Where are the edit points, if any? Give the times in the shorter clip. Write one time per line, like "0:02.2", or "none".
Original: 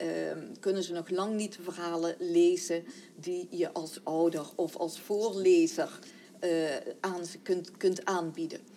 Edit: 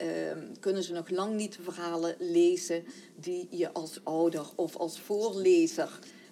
none